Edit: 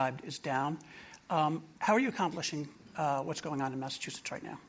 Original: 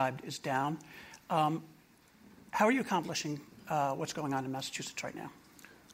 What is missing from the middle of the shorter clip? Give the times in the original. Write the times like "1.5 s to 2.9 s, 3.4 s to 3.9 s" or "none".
1.7 s to 2.5 s